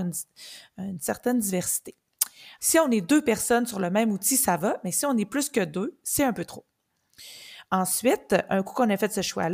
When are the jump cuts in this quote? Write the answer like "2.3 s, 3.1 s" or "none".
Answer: 2.6 s